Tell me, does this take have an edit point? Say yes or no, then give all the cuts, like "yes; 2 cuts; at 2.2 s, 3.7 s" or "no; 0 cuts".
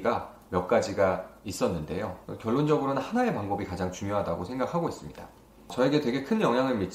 no; 0 cuts